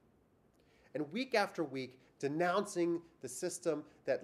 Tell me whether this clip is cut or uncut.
cut